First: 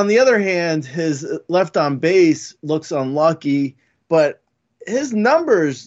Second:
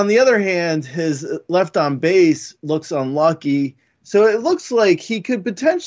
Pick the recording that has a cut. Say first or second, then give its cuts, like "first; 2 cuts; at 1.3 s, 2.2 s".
first; 1 cut; at 4.0 s